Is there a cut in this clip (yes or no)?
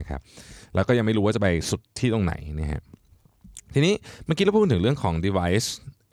no